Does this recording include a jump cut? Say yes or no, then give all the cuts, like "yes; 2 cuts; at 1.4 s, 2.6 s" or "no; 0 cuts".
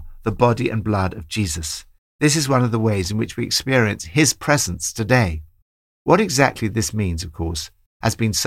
no; 0 cuts